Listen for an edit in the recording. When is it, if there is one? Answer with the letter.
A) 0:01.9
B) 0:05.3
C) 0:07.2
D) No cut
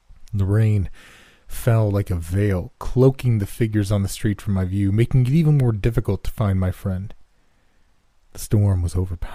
D